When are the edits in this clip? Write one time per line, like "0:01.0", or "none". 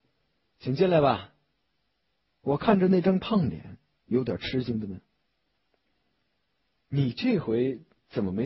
none